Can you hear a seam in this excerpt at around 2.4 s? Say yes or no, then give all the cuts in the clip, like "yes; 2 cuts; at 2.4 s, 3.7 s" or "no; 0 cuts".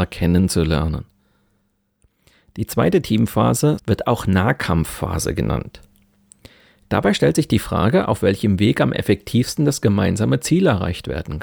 no; 2 cuts; at 3.8 s, 6.8 s